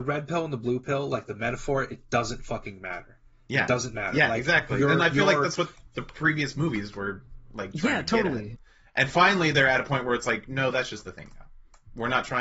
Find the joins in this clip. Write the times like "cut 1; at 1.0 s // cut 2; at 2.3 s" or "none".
none